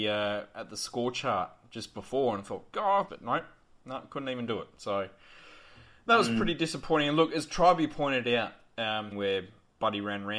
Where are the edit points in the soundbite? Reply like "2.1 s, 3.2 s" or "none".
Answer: 3.1 s, 9.1 s